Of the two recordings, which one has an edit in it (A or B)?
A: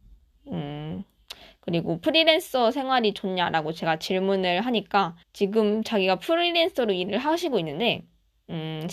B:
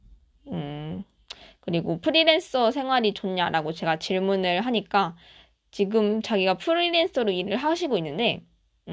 A